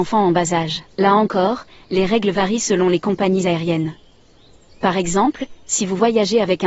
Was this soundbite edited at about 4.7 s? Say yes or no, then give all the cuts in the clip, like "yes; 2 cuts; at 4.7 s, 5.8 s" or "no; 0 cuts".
no; 1 cut; at 0.9 s